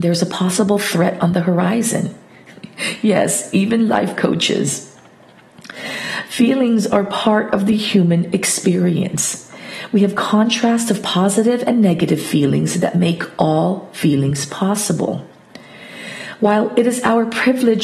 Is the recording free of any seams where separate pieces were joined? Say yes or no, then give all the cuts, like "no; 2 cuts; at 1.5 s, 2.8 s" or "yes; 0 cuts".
yes; 0 cuts